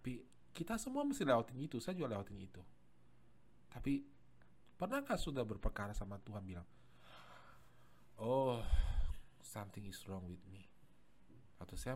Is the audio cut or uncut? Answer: uncut